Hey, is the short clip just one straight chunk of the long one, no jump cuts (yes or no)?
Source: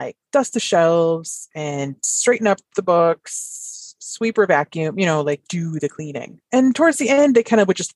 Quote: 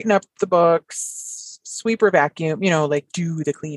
yes